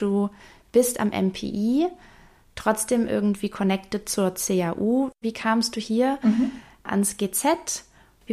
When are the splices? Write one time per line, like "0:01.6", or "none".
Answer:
0:05.2

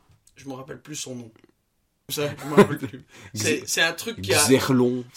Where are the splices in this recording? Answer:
0:02.1

